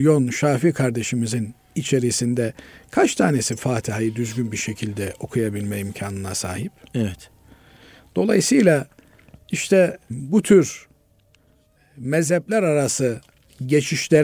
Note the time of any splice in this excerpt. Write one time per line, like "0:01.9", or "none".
none